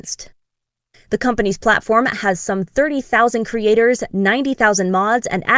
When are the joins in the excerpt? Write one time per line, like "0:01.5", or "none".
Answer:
0:00.9